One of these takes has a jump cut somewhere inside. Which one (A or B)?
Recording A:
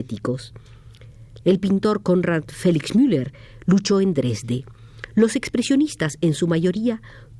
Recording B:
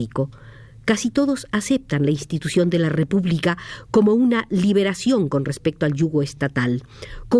A